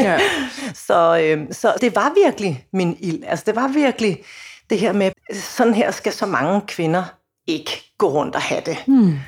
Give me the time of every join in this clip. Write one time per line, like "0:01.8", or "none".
0:01.8
0:05.1

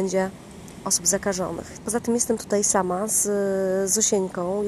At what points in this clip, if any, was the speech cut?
0:01.8

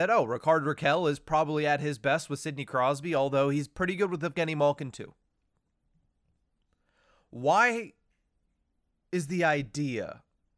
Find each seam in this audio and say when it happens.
none

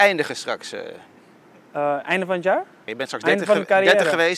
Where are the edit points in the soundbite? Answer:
0:02.9

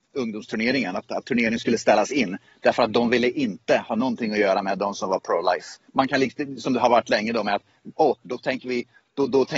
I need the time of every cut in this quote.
0:05.9
0:08.2

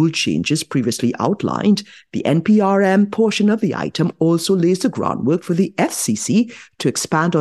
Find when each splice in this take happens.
none

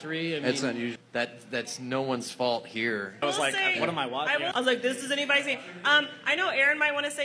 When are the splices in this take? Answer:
0:01.0
0:03.2
0:04.5

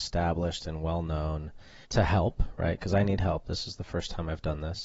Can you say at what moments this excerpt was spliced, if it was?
0:01.8

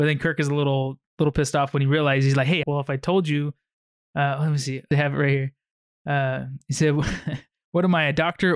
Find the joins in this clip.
0:02.6
0:04.9

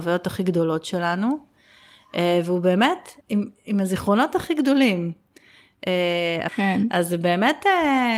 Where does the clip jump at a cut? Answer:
0:03.2
0:06.5

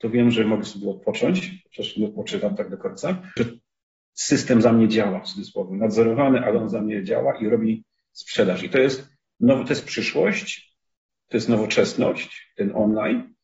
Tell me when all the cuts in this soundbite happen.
0:03.4

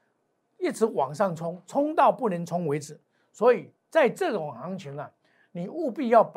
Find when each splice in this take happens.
none

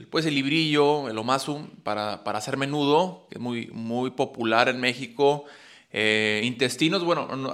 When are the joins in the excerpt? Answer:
none

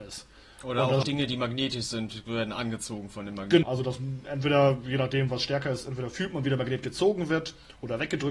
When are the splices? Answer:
0:01.0
0:03.6

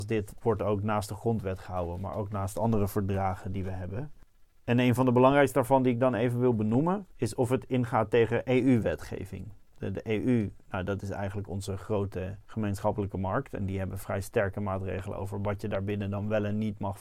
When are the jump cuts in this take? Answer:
none

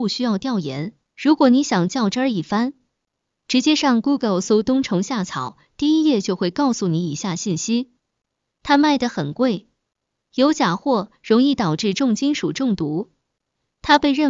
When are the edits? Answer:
0:01.1

